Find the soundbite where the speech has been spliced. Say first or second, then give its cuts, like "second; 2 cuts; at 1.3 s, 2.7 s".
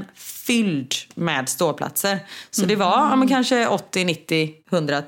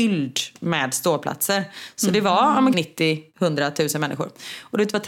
second; 1 cut; at 2.7 s